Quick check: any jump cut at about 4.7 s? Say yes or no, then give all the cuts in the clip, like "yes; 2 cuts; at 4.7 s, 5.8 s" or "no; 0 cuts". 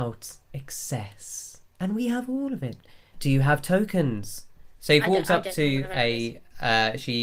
yes; 2 cuts; at 3.1 s, 4.7 s